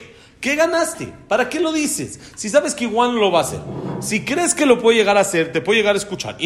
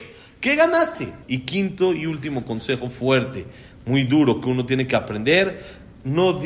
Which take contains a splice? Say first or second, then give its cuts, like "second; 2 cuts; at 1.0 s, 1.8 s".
second; 1 cut; at 1.2 s